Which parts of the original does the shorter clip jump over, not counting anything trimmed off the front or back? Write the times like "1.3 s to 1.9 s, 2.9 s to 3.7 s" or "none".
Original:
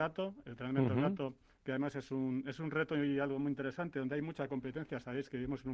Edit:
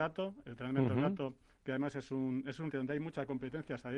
2.7 s to 3.9 s